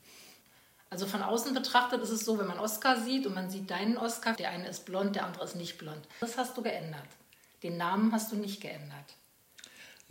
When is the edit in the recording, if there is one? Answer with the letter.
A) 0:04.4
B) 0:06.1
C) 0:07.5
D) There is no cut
A